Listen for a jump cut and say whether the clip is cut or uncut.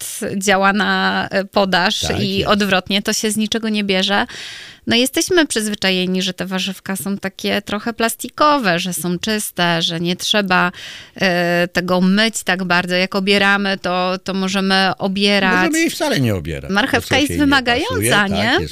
cut